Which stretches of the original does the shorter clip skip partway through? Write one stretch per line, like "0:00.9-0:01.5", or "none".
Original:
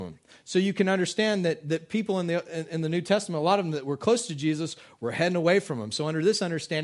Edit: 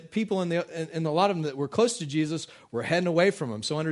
0:02.8-0:03.3